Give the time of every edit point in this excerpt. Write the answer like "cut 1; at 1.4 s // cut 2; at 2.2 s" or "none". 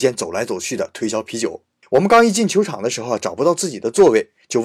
cut 1; at 1.8 s